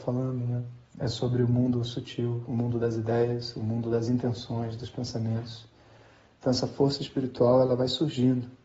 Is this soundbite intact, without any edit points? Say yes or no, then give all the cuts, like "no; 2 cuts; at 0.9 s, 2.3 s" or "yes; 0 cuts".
yes; 0 cuts